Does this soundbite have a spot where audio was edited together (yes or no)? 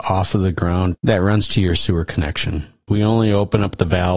yes